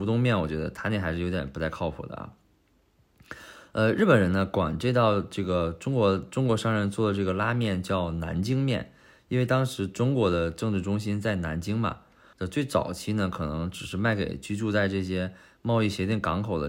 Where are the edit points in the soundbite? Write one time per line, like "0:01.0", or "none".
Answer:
0:12.3